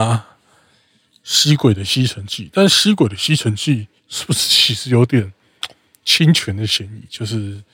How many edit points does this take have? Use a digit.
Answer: 1